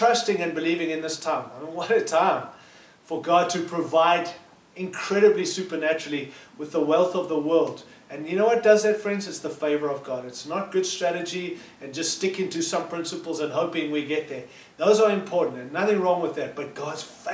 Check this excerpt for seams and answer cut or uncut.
uncut